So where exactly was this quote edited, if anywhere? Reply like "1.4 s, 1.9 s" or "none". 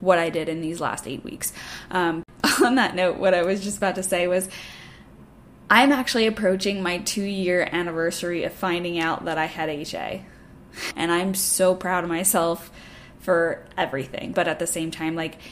10.9 s, 14.3 s

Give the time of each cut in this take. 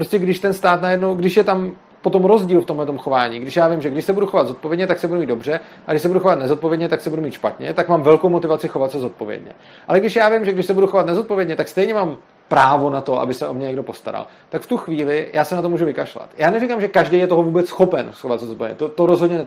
none

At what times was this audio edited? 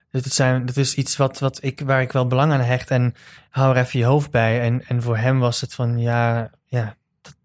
none

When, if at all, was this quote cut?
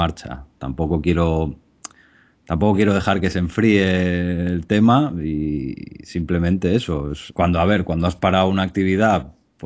7.3 s

